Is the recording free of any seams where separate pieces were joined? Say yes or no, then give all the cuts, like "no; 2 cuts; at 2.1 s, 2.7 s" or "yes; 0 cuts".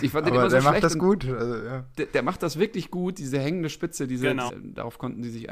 no; 1 cut; at 4.5 s